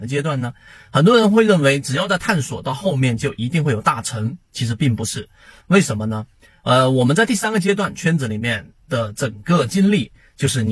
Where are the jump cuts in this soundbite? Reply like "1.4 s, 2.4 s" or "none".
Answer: 5.6 s